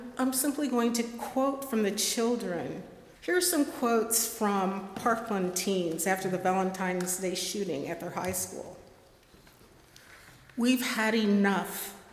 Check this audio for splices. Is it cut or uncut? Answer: cut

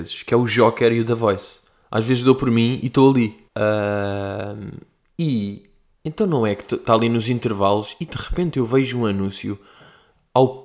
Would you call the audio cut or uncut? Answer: cut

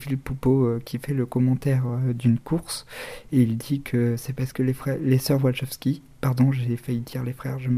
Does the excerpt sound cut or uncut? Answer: uncut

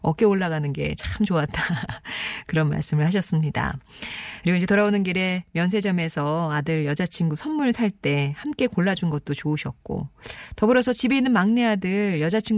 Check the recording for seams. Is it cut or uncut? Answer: uncut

